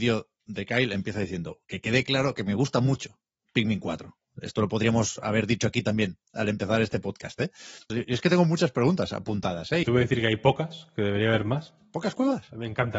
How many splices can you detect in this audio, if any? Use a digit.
2